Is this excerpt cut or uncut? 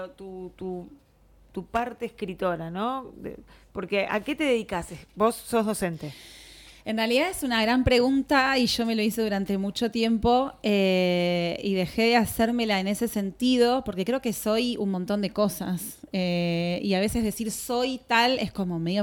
uncut